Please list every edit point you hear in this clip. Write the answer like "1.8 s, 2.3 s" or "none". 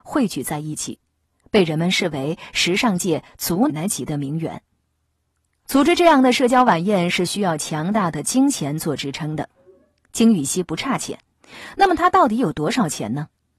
3.7 s